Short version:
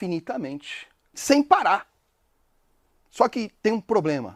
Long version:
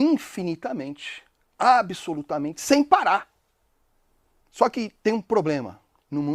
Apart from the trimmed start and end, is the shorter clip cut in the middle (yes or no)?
yes